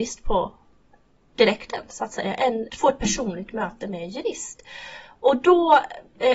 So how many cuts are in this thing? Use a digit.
1